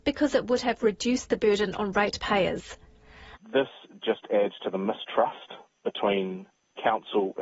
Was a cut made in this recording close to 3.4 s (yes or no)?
yes